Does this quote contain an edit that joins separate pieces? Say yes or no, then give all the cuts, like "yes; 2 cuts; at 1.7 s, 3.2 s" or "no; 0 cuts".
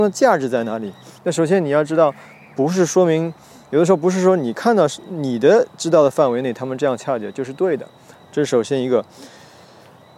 yes; 1 cut; at 1.2 s